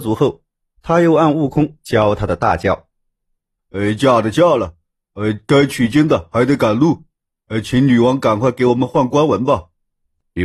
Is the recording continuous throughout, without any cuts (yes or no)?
no